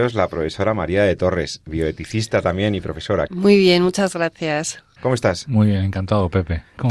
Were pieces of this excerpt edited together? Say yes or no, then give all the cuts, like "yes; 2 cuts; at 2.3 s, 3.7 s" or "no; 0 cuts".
yes; 2 cuts; at 3.3 s, 5.0 s